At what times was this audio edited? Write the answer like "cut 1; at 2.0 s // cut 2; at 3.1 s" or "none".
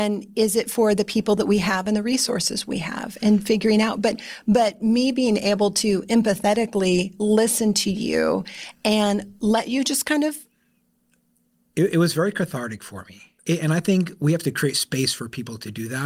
none